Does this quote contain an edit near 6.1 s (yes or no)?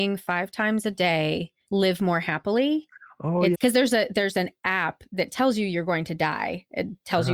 no